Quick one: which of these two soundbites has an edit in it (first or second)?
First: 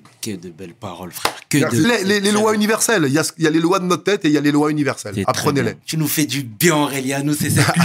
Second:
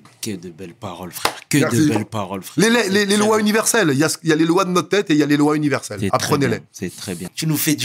first